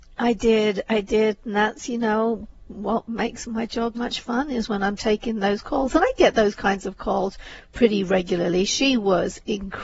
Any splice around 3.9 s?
yes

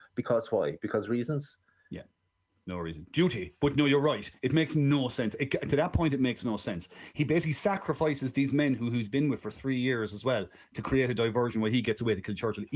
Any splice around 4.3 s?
no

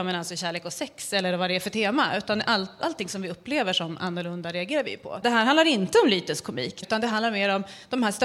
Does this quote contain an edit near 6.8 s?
yes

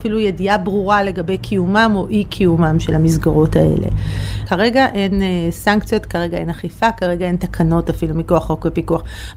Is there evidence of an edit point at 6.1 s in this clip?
no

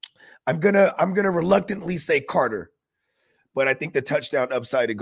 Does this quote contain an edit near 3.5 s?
no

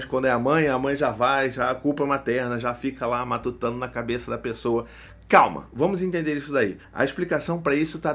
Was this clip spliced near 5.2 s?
no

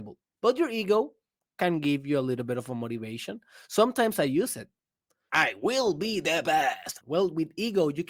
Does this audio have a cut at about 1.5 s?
no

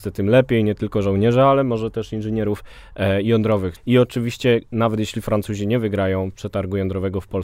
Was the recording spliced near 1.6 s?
no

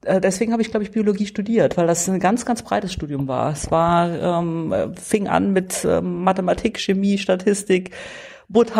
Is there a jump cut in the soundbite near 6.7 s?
yes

